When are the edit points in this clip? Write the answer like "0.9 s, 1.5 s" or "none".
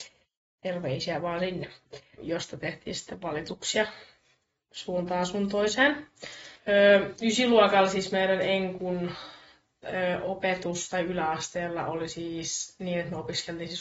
2.2 s, 6.6 s